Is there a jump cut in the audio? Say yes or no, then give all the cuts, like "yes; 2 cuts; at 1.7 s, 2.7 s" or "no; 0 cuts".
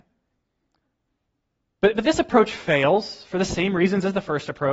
no; 0 cuts